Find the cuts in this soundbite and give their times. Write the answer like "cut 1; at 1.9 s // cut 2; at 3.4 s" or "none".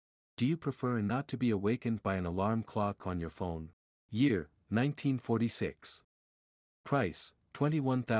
cut 1; at 3.9 s